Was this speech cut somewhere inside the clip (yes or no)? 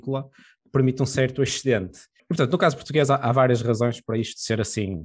yes